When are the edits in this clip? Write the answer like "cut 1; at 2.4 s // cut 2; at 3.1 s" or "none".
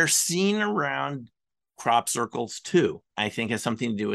cut 1; at 3.1 s